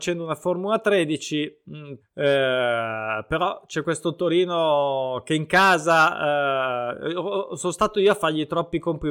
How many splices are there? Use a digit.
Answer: 1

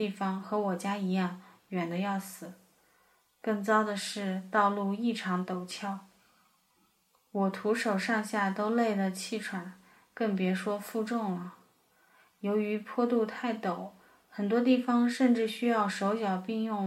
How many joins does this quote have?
0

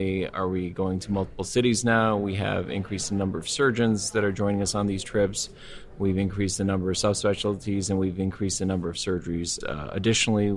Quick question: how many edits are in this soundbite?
1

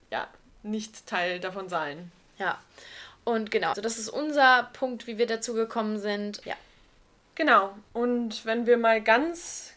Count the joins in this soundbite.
2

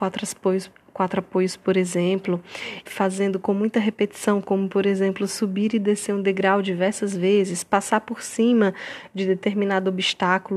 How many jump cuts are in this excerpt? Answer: 1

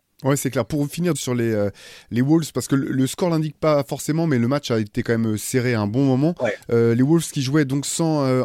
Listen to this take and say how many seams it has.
1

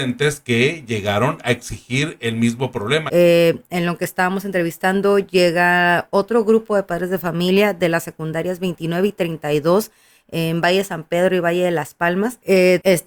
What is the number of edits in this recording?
1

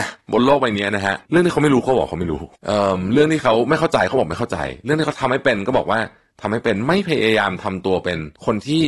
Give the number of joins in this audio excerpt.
1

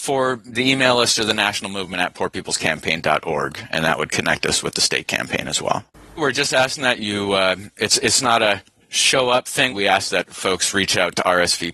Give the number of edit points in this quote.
2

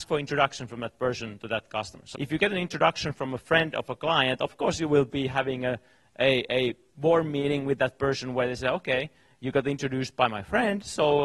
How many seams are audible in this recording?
1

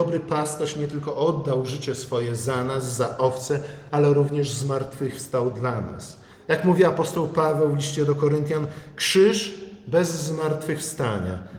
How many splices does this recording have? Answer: 0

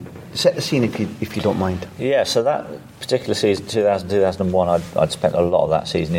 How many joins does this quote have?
0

